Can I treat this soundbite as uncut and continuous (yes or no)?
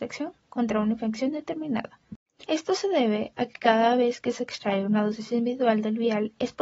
no